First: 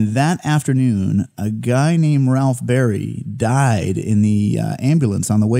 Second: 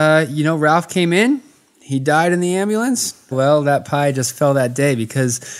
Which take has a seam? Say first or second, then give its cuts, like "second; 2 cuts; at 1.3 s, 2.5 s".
second; 1 cut; at 3.3 s